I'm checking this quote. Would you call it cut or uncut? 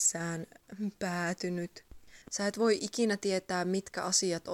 cut